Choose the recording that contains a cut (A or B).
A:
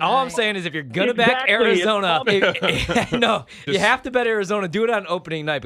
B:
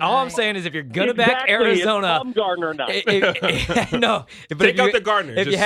A